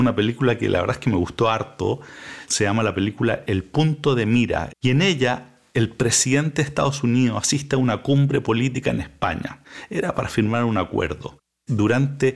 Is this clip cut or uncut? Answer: cut